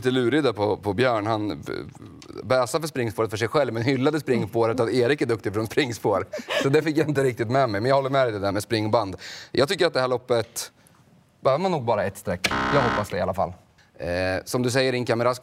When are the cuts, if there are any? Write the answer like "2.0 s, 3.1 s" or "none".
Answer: 8.5 s, 13.8 s